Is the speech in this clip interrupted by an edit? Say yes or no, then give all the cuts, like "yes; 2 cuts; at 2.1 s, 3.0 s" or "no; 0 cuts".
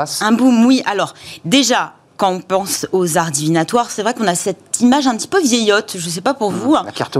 no; 0 cuts